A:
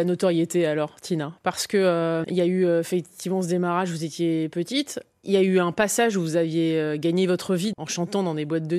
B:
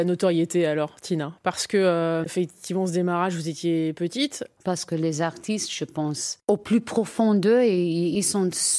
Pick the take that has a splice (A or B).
B